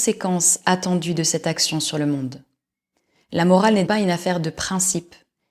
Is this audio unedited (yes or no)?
no